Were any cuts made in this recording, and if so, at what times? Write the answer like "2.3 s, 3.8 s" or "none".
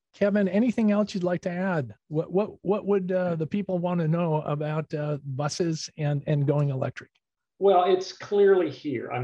none